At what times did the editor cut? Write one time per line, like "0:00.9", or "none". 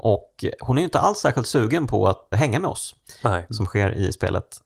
0:02.3
0:03.5